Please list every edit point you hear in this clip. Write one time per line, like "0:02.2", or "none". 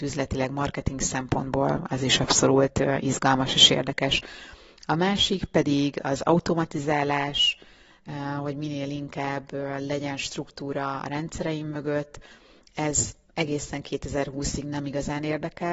none